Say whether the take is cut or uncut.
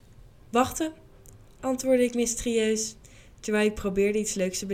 uncut